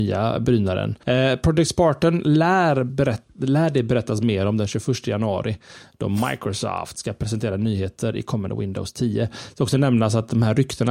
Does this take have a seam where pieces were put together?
yes; 1 cut; at 1.0 s

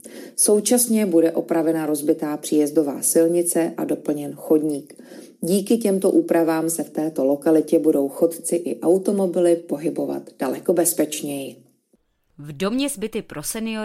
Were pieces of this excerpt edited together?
no; 0 cuts

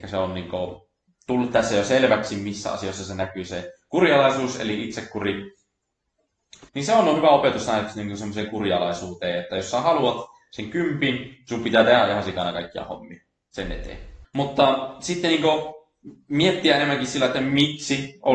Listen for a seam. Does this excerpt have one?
yes; 2 cuts; at 6.7 s, 14.2 s

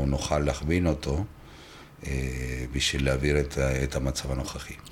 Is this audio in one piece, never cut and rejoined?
yes; 0 cuts

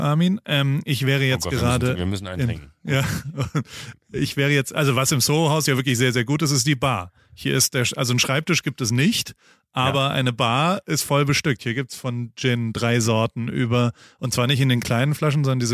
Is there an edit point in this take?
no; 0 cuts

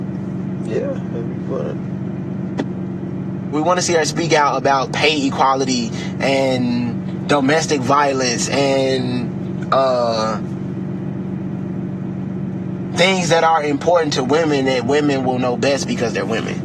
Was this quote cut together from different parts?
yes; 1 cut; at 3.5 s

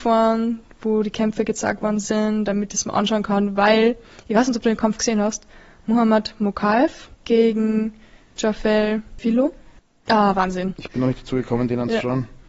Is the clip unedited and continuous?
no; 2 cuts; at 7.1 s, 10.1 s

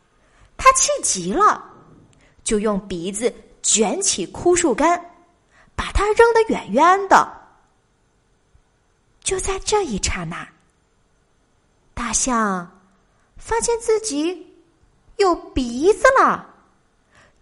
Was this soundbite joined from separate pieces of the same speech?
no; 0 cuts

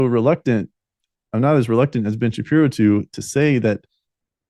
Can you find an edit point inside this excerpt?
no; 0 cuts

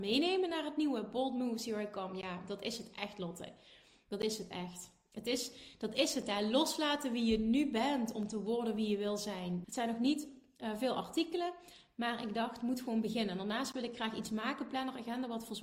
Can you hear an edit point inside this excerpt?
yes; 1 cut; at 9.6 s

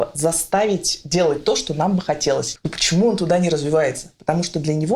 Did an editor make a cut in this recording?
yes; 1 cut; at 2.6 s

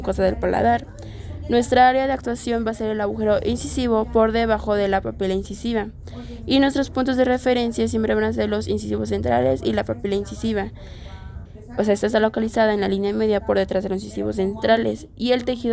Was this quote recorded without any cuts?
no; 1 cut; at 11.5 s

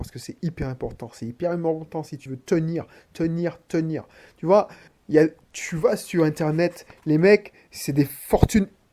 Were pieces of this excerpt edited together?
no; 0 cuts

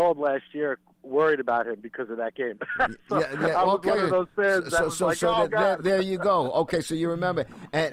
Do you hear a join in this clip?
yes; 1 cut; at 5.5 s

